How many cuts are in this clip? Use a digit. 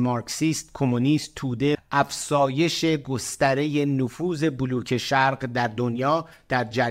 1